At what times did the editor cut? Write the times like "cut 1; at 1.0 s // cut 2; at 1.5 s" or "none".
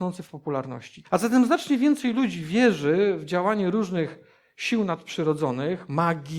cut 1; at 1.0 s